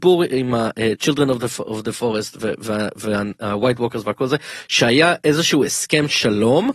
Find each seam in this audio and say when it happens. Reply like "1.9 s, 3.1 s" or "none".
none